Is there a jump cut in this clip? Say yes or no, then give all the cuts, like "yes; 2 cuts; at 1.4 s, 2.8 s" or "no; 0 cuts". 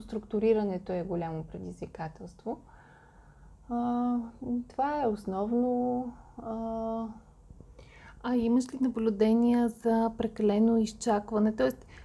no; 0 cuts